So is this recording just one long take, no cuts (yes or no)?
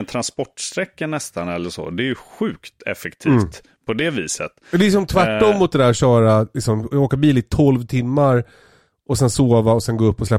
yes